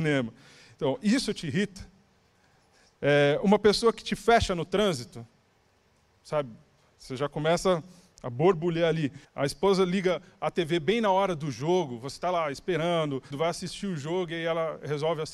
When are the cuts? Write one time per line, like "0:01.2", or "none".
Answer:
0:09.2
0:13.3

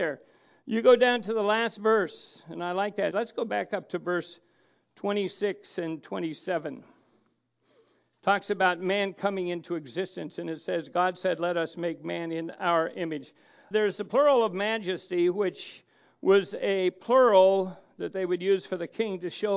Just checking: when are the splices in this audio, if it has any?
0:03.1
0:13.7

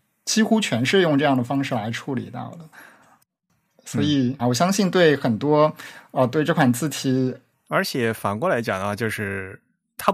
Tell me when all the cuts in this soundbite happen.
0:04.4
0:07.5

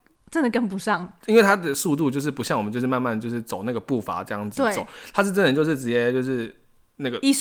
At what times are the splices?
none

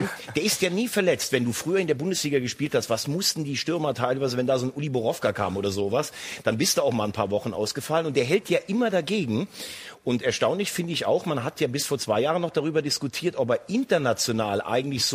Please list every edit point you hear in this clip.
none

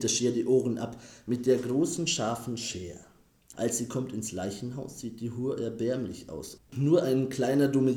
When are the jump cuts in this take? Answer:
0:03.5
0:06.6

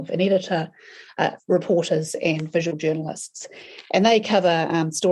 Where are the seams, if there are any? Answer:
none

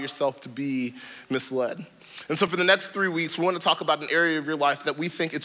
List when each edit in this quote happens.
none

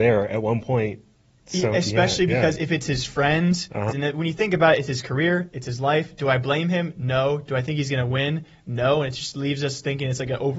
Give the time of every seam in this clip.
0:03.9

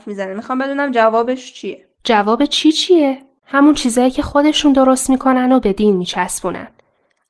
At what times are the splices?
0:03.4

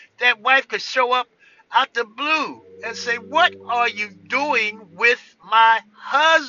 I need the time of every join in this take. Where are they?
none

